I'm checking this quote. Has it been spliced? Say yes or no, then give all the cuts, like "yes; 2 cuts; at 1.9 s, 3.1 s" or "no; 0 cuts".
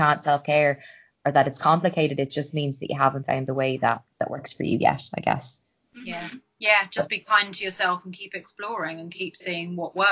no; 0 cuts